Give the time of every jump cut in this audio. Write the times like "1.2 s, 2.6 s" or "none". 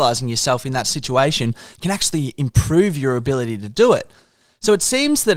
none